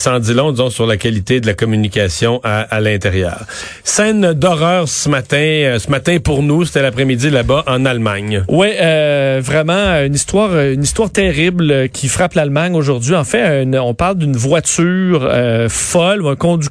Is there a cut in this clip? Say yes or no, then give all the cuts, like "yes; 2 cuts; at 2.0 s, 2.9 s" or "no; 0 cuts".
no; 0 cuts